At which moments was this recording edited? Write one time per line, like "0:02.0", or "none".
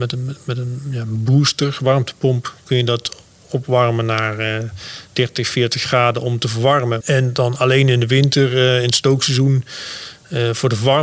0:07.0